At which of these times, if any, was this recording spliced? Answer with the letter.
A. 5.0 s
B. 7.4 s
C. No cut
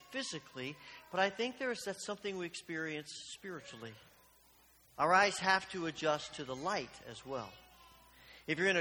A